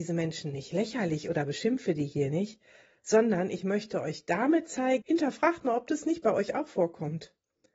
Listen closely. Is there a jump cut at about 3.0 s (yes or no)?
no